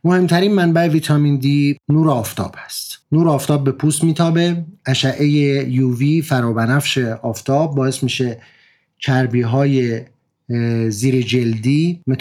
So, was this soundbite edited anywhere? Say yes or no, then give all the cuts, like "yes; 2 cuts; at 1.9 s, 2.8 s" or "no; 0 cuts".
no; 0 cuts